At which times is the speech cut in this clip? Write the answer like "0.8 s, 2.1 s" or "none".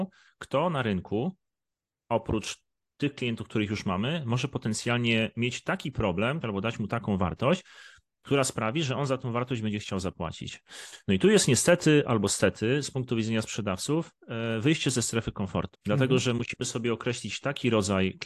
6.4 s, 15.7 s